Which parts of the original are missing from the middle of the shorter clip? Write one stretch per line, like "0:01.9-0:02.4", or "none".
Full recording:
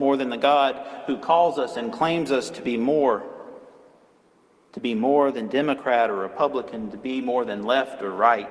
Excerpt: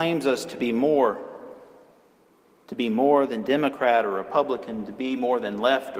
none

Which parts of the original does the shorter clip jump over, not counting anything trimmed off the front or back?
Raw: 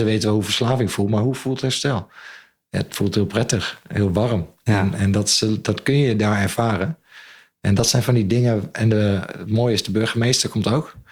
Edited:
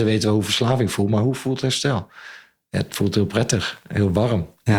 none

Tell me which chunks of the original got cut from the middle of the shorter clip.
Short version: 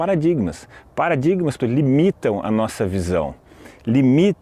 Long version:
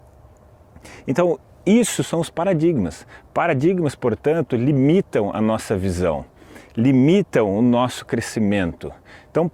0:04.0-0:04.5

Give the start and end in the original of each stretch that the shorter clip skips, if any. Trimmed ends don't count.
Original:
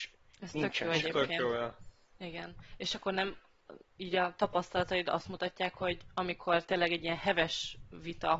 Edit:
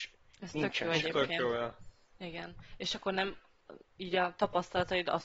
none

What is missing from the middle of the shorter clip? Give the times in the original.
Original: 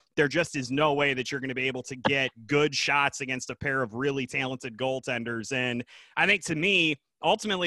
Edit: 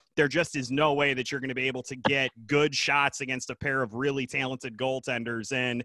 none

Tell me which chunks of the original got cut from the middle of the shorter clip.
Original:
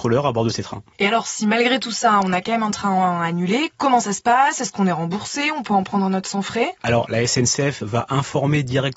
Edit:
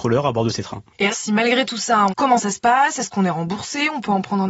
0:01.1-0:01.2
0:02.2-0:03.7

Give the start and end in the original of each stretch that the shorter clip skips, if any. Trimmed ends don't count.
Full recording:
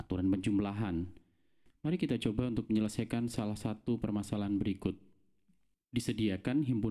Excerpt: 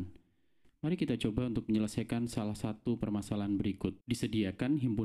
0:05.0-0:05.8

